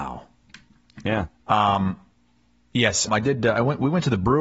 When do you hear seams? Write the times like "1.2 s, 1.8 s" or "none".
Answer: 3.1 s